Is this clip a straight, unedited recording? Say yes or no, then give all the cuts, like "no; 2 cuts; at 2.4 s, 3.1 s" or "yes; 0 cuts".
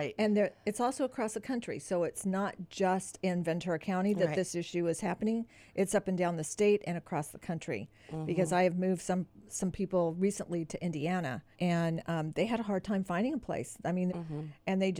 no; 2 cuts; at 11.5 s, 14.1 s